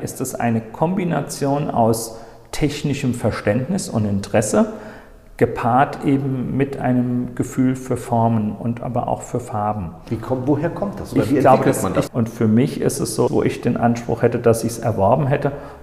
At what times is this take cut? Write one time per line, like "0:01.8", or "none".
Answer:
0:12.1
0:13.3